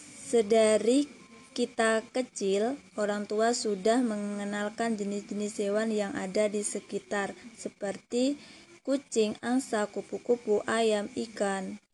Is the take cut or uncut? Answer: uncut